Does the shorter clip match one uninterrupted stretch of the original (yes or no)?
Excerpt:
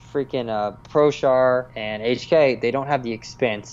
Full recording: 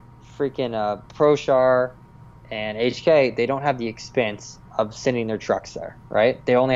no